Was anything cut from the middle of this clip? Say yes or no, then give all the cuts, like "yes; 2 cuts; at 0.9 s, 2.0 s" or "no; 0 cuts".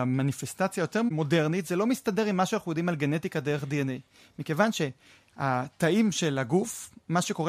no; 0 cuts